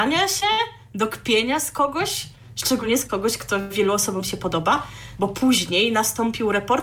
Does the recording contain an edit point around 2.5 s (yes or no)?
no